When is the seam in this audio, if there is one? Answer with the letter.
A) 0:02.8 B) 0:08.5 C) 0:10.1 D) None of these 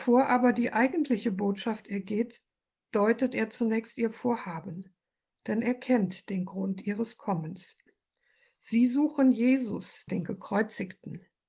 C